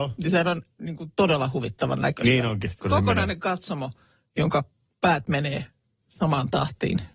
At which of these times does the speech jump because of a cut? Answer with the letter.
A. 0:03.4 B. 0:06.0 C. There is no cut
C